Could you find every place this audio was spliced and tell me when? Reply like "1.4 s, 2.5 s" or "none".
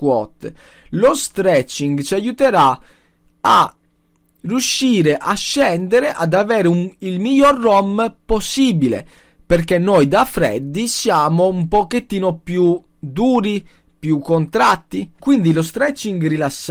15.2 s